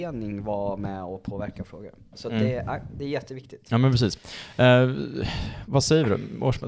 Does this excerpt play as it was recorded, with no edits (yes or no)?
yes